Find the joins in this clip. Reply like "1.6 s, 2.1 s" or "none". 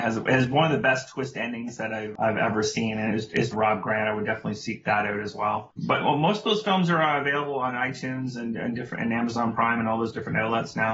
3.5 s